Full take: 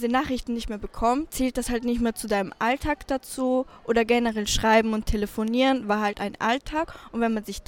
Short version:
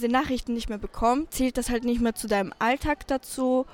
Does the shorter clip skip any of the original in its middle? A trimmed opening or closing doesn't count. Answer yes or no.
no